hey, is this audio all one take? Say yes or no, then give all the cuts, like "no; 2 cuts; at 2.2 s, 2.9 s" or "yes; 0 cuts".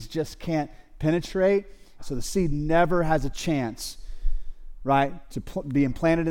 no; 2 cuts; at 2.0 s, 5.3 s